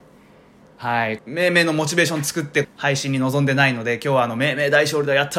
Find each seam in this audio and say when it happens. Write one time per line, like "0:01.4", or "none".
0:01.2
0:02.6